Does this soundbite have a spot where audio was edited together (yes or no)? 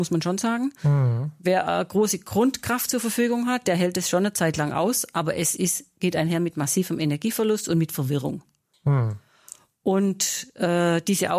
no